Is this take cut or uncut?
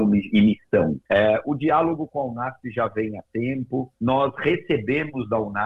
cut